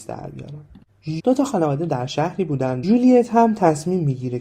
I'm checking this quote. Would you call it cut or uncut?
cut